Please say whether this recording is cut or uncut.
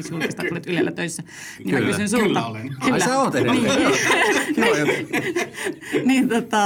uncut